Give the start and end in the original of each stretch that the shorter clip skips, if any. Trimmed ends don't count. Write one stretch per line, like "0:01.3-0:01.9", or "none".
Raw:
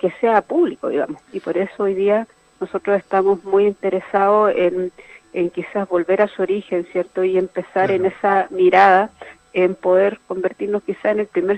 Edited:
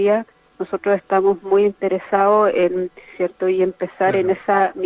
0:05.1-0:06.9